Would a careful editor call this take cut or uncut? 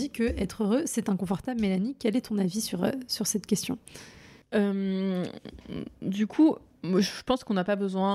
uncut